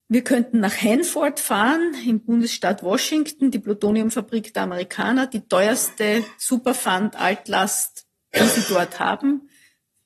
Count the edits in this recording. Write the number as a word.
zero